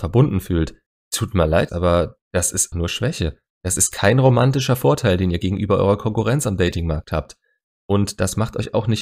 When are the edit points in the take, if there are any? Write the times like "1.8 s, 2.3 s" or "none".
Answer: 1.7 s, 2.7 s